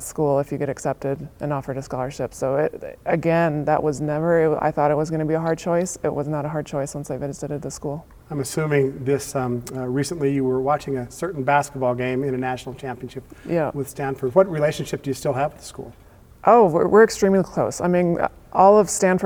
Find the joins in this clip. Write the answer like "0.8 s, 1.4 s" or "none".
none